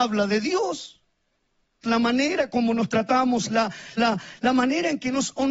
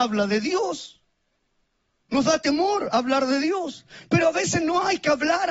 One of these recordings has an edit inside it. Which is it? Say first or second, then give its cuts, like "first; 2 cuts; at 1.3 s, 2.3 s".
first; 2 cuts; at 1.8 s, 4.0 s